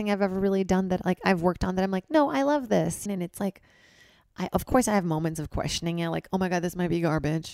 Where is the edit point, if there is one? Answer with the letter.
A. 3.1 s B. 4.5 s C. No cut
A